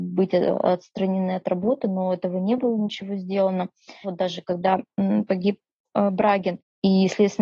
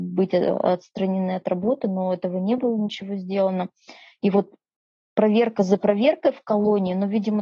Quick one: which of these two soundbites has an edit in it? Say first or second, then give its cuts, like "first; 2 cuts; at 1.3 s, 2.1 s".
first; 1 cut; at 4.0 s